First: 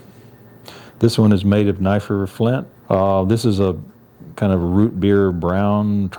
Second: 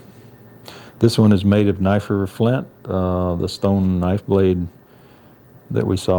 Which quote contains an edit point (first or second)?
first